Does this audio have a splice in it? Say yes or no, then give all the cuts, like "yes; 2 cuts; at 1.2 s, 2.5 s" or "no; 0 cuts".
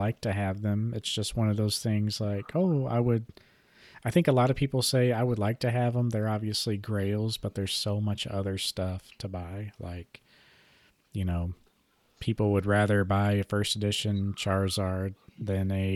no; 0 cuts